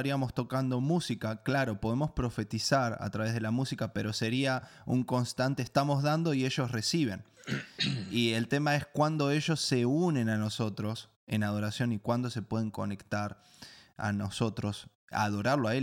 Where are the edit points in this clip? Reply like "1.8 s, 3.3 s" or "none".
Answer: none